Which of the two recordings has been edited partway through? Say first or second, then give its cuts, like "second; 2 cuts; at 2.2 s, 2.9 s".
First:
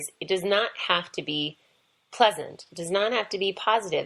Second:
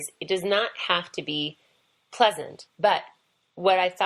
second; 1 cut; at 2.7 s